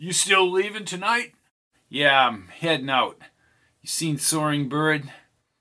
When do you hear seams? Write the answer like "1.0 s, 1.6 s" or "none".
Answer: none